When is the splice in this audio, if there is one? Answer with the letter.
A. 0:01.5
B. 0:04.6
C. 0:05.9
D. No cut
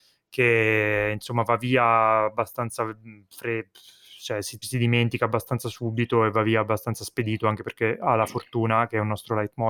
B